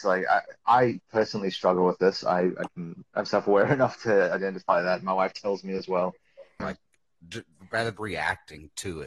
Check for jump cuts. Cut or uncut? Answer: cut